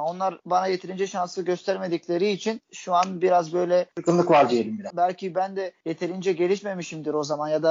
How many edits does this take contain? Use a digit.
1